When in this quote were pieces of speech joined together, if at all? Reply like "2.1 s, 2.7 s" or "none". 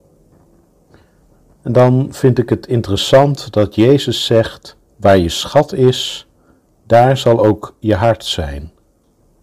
4.9 s